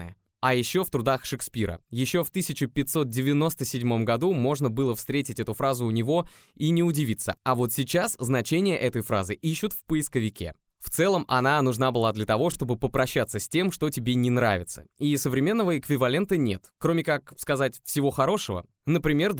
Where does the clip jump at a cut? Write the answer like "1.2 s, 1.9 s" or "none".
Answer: none